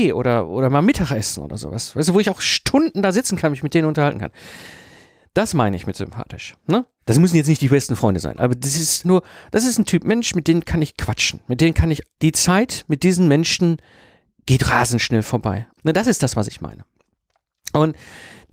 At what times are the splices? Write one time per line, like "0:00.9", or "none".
0:09.0
0:12.2
0:15.8